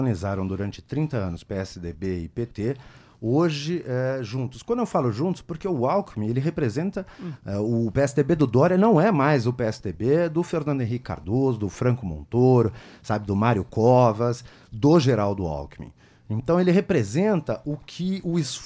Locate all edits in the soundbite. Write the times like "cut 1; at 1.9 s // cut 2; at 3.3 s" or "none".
cut 1; at 7.3 s